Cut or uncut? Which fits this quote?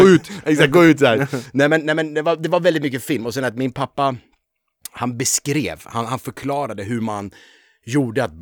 uncut